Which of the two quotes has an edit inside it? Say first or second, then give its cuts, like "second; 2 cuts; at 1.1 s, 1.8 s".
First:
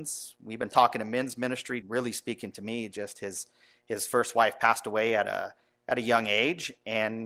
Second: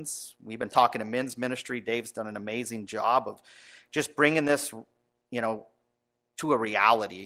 first; 1 cut; at 1.8 s